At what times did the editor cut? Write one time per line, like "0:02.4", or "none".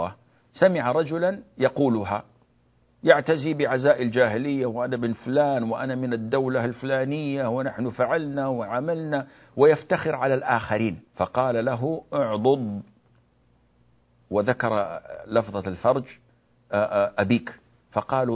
0:11.1